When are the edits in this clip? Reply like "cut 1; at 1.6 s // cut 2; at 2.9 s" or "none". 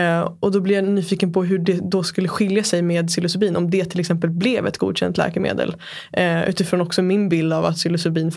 none